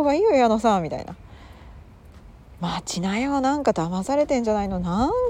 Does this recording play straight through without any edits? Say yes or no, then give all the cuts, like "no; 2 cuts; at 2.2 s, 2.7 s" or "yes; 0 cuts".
yes; 0 cuts